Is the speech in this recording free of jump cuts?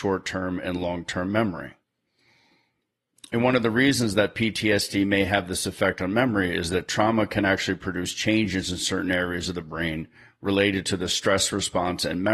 yes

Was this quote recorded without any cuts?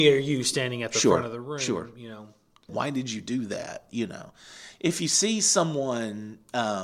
no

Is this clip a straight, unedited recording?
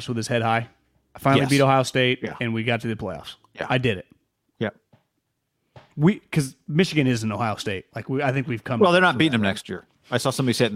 yes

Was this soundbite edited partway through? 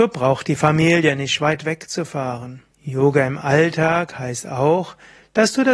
yes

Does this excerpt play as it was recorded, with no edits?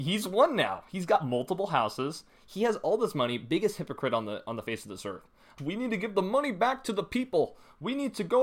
no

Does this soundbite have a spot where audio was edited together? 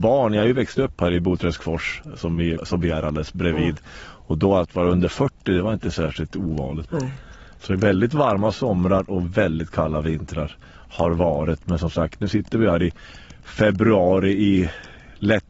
yes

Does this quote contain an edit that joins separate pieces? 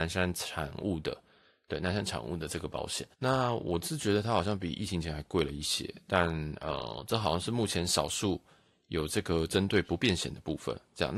yes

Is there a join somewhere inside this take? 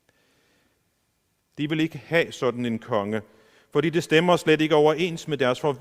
yes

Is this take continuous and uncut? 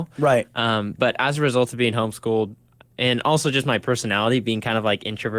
yes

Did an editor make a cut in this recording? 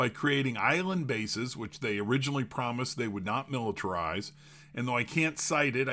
no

